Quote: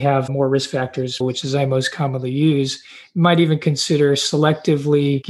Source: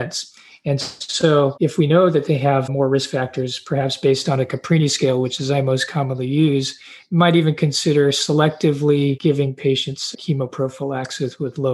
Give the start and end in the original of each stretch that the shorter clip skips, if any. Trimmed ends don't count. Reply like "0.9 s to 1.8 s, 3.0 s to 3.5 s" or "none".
3.6 s to 5.2 s